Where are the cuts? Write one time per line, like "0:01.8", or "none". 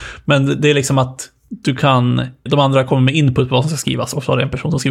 0:02.5